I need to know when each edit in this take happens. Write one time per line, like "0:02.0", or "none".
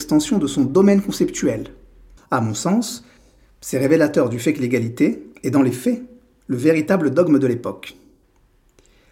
0:02.2